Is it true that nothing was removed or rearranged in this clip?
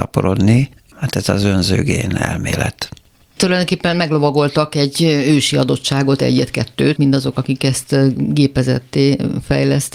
no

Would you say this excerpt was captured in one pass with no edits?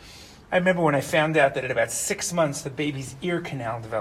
yes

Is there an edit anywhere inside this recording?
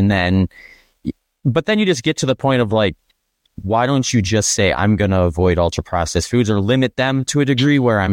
no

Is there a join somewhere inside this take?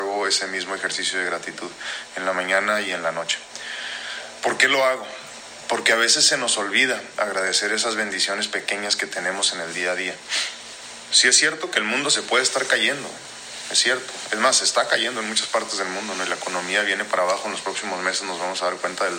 no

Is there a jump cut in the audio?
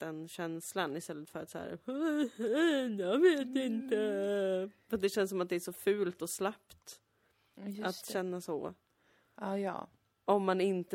no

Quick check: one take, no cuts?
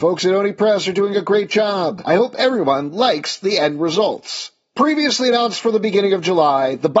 yes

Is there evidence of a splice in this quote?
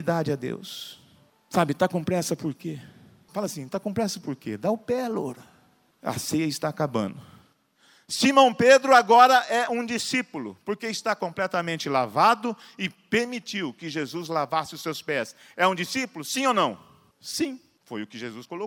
no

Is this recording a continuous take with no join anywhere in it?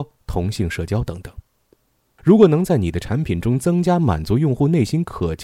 no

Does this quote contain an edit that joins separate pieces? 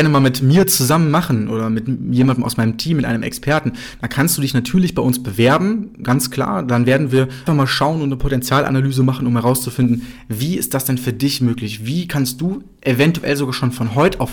yes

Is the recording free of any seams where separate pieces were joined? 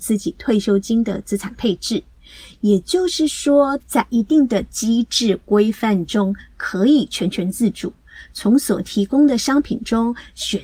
no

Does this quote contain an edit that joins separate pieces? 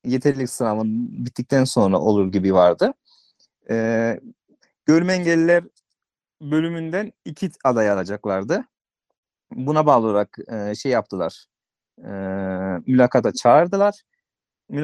no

